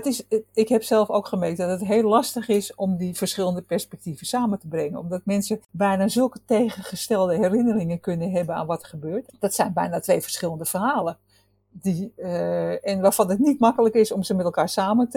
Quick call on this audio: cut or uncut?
cut